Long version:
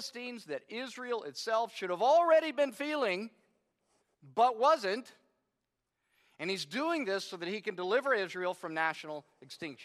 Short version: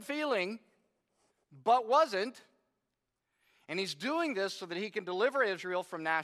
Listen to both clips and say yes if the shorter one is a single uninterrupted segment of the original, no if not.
yes